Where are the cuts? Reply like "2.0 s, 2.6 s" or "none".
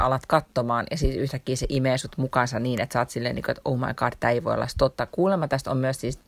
none